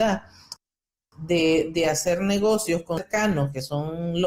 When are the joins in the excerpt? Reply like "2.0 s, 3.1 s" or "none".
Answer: none